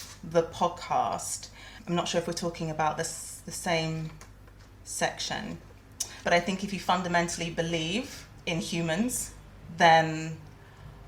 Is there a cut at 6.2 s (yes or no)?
yes